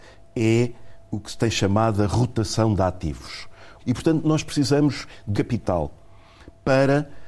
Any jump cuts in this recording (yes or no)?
yes